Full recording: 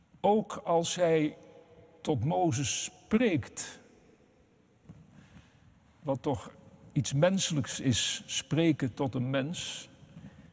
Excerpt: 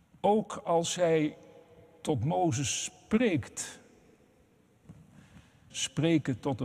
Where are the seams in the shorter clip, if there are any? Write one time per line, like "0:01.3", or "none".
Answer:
0:05.7

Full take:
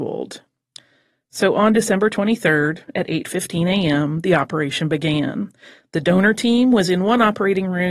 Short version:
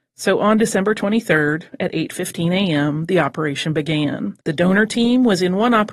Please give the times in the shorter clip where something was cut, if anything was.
0:04.4

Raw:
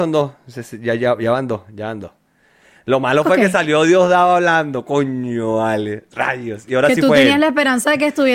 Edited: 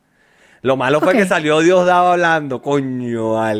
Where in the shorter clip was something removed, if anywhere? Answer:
none

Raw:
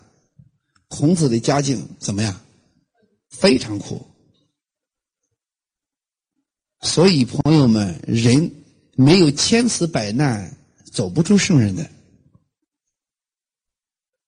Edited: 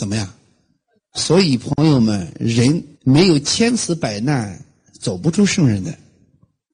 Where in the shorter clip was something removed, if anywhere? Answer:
0:01.0
0:02.9

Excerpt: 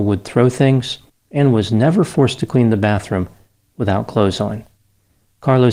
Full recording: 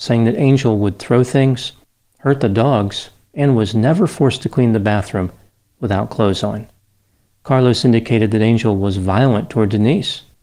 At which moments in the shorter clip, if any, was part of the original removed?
0:01.2

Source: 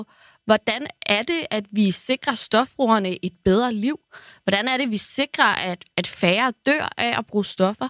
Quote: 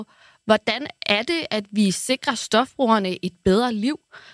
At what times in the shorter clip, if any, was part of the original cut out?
none

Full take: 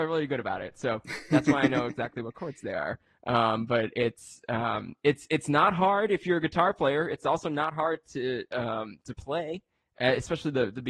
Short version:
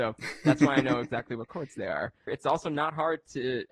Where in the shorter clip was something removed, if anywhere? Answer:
0:02.3

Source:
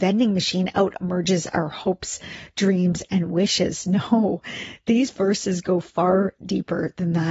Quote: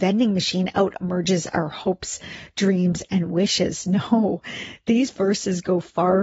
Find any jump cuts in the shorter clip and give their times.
none

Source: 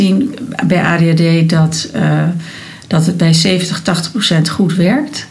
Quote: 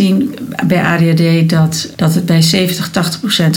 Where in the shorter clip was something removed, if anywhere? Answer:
0:01.9

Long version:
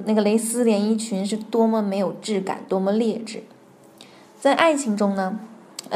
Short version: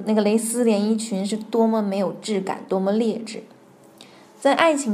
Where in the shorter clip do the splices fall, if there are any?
none

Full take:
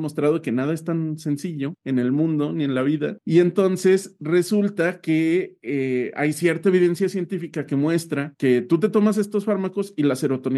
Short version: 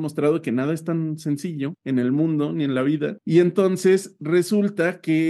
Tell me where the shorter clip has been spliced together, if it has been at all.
none

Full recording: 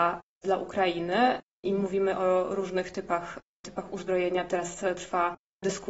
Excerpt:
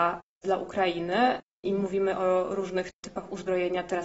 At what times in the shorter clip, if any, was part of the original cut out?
0:02.9

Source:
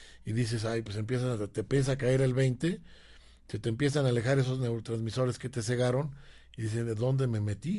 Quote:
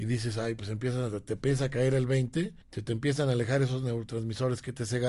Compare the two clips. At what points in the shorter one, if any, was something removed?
0:02.6

